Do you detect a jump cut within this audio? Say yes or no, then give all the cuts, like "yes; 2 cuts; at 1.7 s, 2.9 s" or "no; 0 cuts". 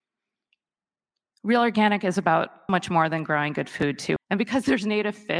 yes; 2 cuts; at 2.7 s, 4.2 s